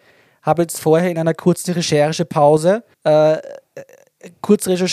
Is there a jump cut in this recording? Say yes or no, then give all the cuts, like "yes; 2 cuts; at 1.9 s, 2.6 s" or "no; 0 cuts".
yes; 1 cut; at 2.9 s